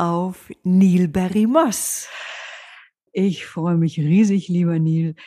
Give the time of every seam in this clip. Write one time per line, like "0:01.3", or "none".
0:03.1